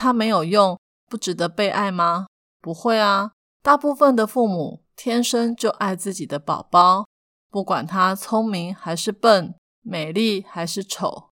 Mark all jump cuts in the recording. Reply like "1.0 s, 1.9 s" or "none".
none